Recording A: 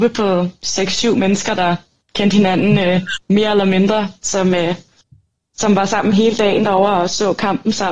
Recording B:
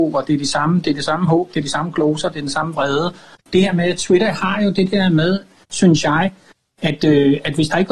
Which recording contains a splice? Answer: B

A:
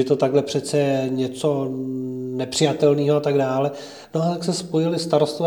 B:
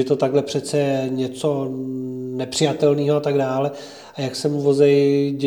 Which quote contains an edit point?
A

